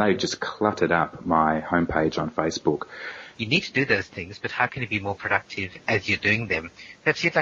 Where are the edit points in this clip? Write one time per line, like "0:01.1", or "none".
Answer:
0:03.3